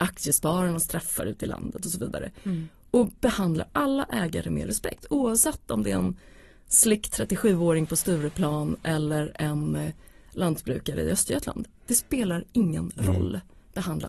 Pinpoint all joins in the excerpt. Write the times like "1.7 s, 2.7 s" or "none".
none